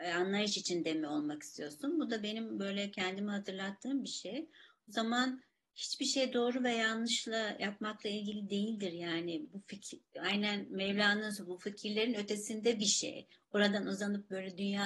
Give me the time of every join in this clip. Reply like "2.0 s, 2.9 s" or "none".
none